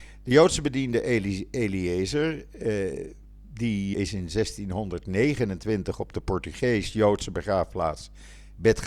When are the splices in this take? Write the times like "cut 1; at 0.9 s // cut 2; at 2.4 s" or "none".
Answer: cut 1; at 3.9 s